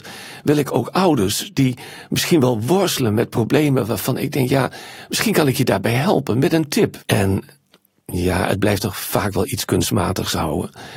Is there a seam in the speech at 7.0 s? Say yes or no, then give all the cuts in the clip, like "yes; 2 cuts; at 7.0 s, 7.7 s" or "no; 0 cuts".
yes; 1 cut; at 7.0 s